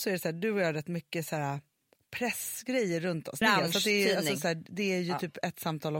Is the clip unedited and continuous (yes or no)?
no